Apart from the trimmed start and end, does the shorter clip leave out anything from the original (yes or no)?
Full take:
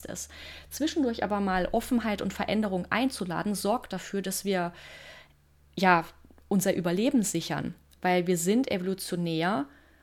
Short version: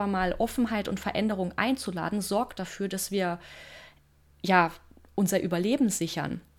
no